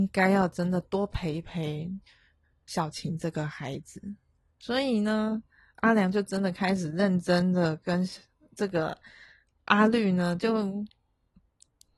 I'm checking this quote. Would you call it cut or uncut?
uncut